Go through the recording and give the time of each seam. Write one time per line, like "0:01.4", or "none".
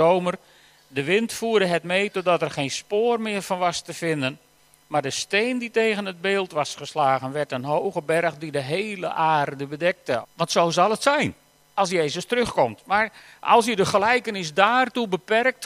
0:10.2

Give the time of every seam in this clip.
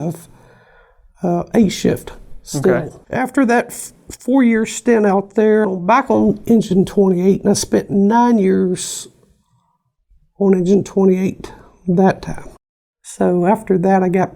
0:03.0
0:05.6

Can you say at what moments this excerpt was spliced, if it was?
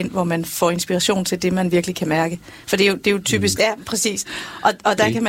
0:03.6

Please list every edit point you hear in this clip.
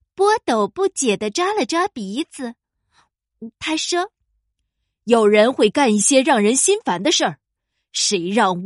0:03.5
0:07.5

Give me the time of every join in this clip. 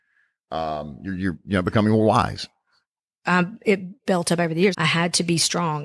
0:04.7

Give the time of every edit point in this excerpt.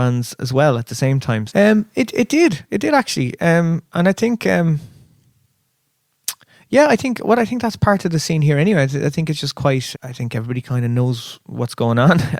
0:01.5
0:09.9

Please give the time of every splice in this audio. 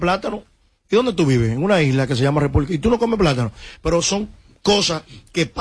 none

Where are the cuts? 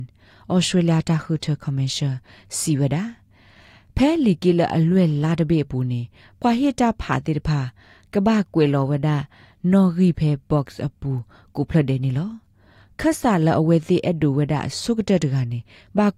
none

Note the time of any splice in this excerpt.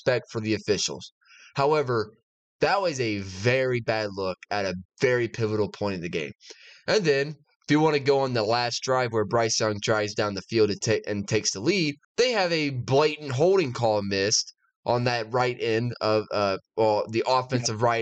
0:12.0

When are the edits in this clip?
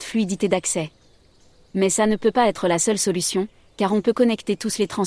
none

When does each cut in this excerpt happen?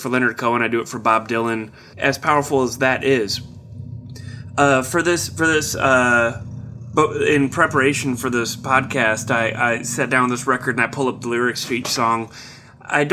0:01.9

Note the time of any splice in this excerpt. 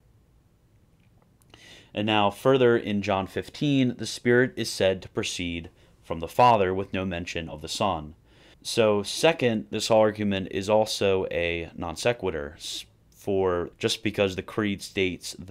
0:08.5
0:13.7

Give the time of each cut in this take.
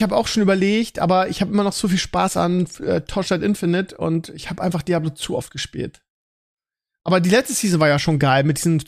none

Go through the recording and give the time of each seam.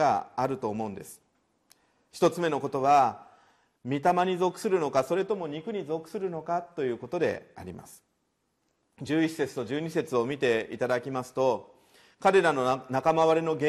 none

